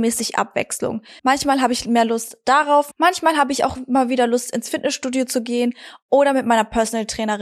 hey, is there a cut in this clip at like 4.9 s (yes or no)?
no